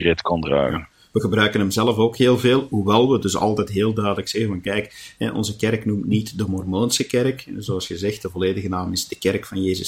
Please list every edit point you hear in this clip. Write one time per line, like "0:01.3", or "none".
none